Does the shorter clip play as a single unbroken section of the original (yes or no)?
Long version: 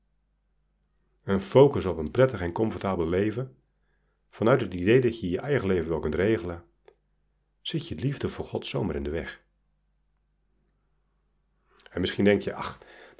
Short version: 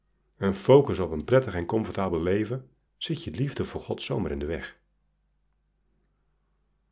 no